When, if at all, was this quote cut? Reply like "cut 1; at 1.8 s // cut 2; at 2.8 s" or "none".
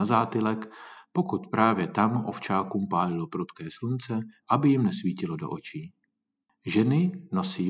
cut 1; at 4.4 s